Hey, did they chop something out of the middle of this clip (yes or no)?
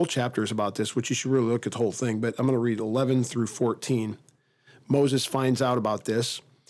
no